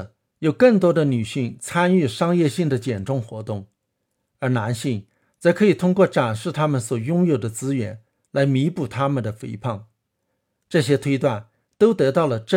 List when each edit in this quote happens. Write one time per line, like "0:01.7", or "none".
none